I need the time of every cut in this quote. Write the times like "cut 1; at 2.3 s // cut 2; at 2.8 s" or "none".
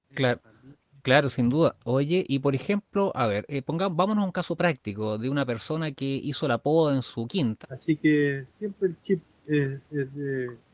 cut 1; at 7.6 s